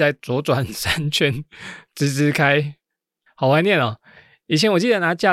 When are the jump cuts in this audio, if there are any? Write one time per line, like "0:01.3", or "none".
none